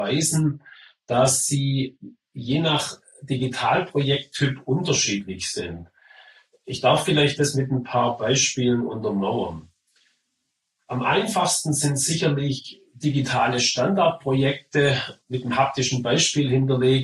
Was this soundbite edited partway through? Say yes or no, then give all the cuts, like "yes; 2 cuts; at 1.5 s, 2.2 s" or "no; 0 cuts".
no; 0 cuts